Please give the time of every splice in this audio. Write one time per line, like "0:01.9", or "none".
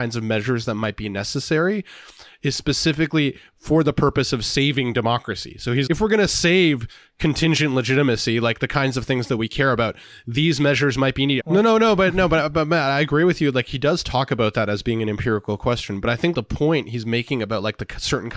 0:05.9
0:11.4
0:16.3